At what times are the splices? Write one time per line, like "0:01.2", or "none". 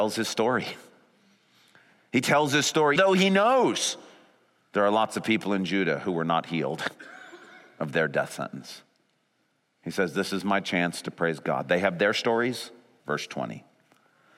0:03.0
0:13.0